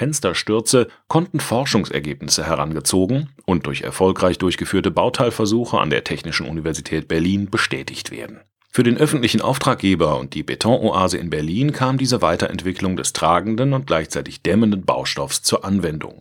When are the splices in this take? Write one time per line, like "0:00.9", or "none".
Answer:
0:08.6